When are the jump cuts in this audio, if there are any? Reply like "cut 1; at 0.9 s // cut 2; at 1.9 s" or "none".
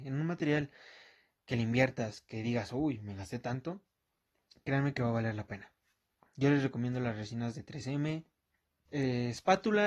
cut 1; at 8.9 s